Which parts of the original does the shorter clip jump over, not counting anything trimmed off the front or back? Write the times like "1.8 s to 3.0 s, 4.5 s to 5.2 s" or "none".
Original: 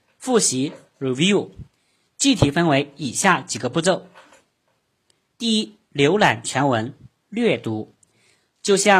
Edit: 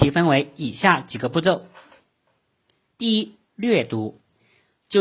5.9 s to 7.2 s

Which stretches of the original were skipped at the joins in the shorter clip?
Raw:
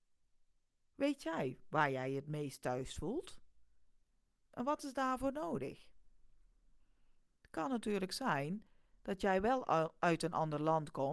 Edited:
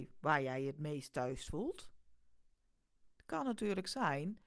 4.5 s to 7.3 s

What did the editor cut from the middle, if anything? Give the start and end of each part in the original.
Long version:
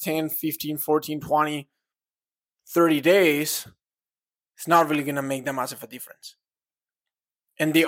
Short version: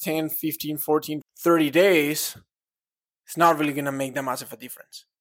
1.2 s to 2.5 s

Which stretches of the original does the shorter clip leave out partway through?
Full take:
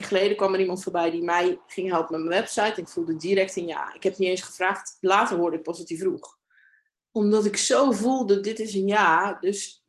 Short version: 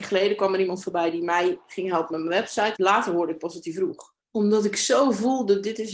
2.8 s to 5.0 s, 6.4 s to 7.0 s

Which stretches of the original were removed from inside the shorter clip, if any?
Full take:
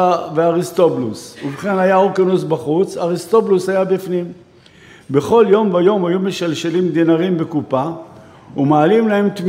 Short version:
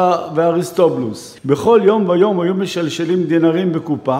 1.4 s to 5.0 s

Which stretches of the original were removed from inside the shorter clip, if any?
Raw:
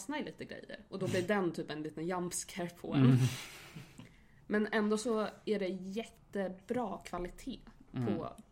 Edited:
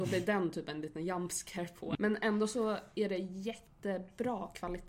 3.0 s to 4.5 s

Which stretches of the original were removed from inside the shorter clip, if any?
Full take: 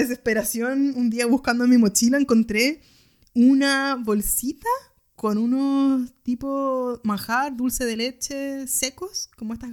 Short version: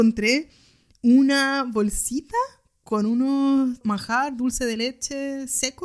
6.1 s to 7.0 s

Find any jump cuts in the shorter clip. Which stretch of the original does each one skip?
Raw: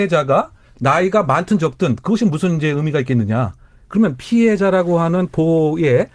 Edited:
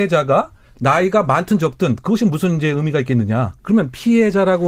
3.6 s to 3.8 s

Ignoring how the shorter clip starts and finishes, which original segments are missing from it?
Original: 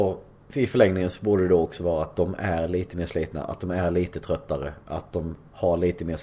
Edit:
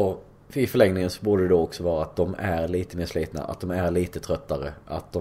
none

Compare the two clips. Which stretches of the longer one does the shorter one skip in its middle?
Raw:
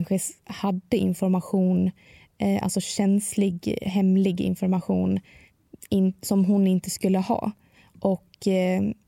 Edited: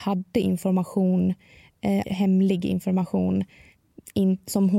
2.6 s to 3.8 s

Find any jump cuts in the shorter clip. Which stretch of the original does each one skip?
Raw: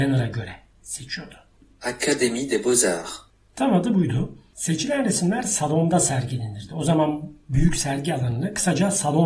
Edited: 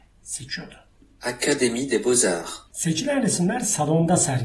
3.3 s to 4.5 s

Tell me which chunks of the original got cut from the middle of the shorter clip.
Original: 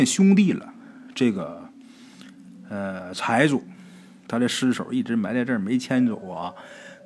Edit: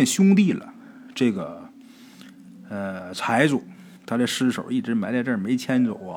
4.0 s to 4.2 s

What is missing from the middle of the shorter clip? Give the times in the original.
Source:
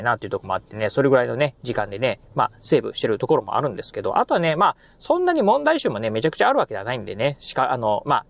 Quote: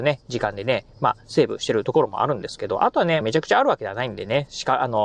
4.6 s to 6.1 s

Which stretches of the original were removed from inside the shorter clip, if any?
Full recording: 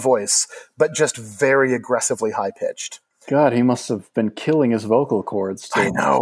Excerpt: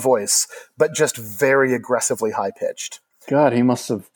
none

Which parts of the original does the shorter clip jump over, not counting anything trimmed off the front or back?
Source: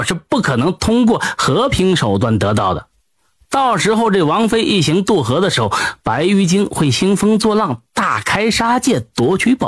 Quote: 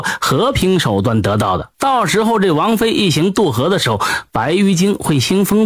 2.9 s to 3.5 s

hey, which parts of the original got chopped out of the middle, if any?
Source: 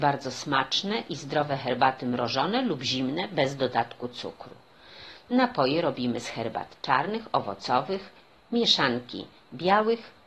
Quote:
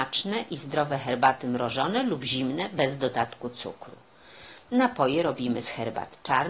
none

